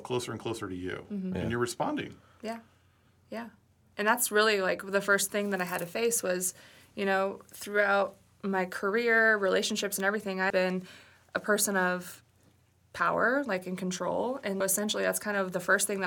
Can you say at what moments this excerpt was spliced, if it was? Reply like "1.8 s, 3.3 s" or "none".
10.5 s, 14.6 s